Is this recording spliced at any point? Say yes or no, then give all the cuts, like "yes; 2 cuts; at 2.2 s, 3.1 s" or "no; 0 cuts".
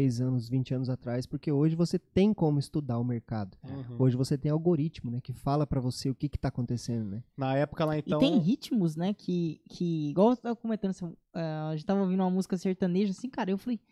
no; 0 cuts